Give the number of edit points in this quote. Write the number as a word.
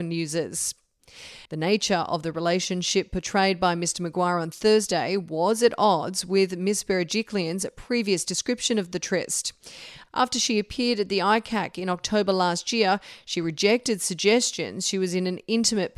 one